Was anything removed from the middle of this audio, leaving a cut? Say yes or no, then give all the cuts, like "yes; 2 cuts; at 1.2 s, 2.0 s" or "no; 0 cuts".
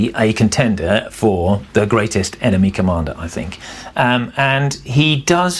yes; 1 cut; at 1.7 s